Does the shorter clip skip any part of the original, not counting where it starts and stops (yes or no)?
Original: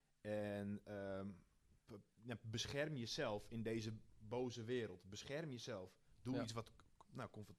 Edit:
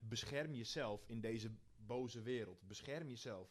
no